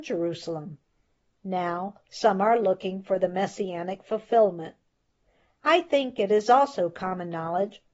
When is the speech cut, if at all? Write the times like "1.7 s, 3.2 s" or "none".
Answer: none